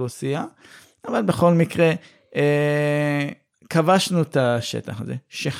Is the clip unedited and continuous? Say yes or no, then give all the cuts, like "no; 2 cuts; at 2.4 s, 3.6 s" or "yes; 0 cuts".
yes; 0 cuts